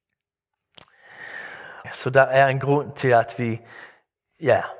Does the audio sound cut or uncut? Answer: cut